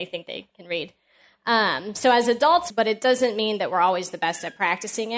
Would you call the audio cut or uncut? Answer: cut